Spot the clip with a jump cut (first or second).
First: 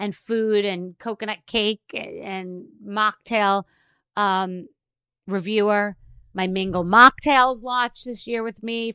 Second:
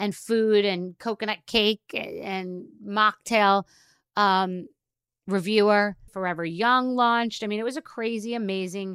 second